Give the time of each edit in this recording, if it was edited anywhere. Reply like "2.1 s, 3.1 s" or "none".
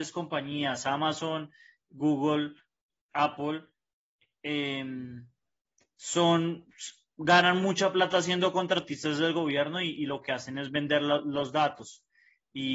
none